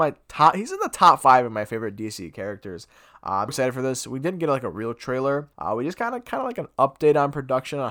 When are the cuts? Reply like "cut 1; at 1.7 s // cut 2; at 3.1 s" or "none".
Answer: cut 1; at 3.5 s // cut 2; at 5.5 s